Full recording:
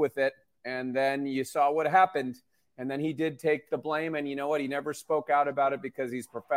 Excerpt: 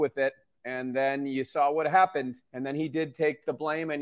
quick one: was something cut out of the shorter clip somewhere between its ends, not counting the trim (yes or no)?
yes